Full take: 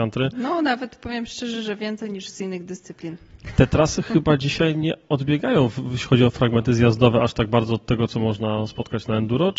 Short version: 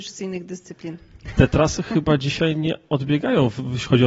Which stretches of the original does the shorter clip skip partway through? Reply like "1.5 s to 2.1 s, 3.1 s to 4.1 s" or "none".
none

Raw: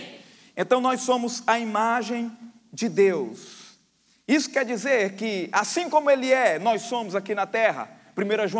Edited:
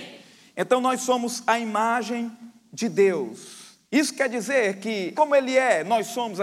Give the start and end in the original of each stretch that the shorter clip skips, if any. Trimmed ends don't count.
3.8 s to 4.2 s, 5.5 s to 5.9 s

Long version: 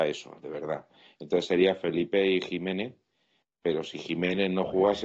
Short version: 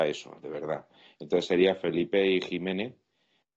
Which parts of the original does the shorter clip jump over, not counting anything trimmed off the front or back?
none

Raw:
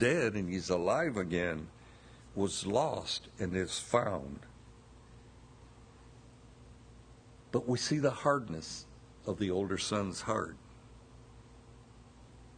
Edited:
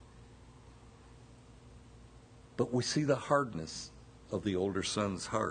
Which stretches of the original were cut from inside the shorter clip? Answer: none

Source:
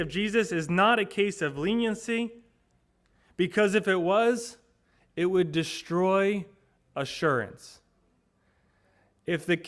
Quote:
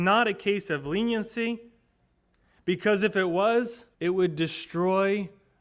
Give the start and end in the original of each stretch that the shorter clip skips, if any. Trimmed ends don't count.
4.6 s to 5.1 s

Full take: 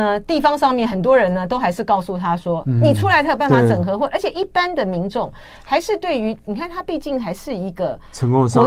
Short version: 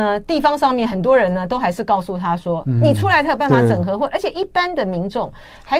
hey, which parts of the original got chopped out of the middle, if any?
none

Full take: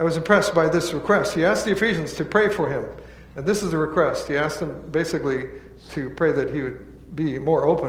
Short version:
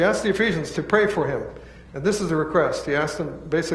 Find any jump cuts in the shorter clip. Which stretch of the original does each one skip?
none

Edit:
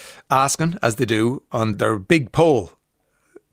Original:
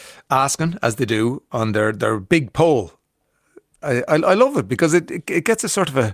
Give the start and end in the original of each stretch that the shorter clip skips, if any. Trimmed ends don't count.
1.7 s to 1.9 s

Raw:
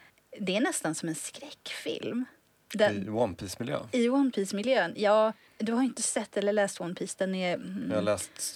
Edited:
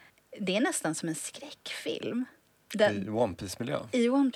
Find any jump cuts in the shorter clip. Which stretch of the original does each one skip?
none

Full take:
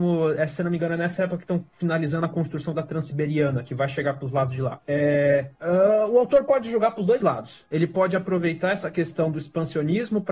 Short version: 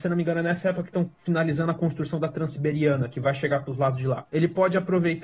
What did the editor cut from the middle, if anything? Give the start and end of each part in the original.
4.8 s to 7.7 s

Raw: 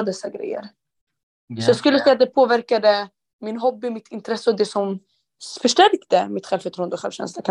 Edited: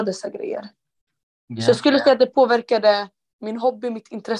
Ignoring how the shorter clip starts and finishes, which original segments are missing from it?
none

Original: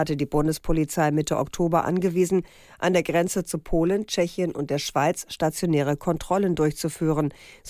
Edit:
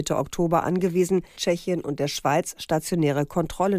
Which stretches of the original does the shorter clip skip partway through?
2.6 s to 4.1 s

